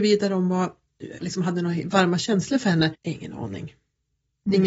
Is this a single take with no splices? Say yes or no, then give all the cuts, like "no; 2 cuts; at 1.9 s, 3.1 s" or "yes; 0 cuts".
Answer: no; 2 cuts; at 1.2 s, 2.9 s